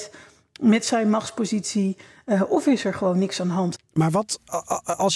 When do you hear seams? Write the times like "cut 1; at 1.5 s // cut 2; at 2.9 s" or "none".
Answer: cut 1; at 3.8 s